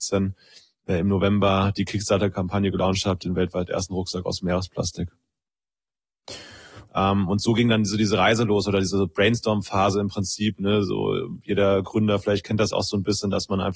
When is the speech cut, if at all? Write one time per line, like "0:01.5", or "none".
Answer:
0:06.9